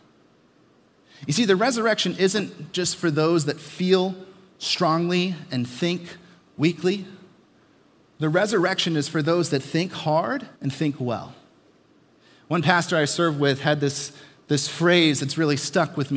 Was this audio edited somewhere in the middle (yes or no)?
yes